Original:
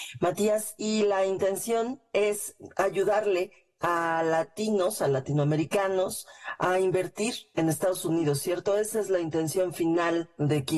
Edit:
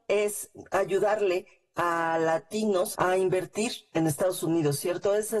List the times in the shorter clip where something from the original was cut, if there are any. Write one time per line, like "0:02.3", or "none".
0:02.9